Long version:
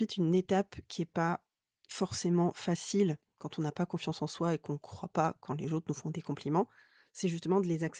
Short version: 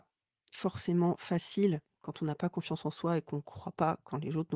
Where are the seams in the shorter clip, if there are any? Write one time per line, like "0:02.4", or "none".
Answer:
none